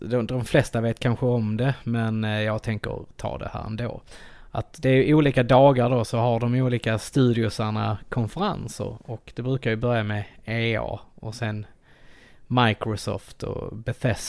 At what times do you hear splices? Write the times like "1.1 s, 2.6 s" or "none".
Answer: none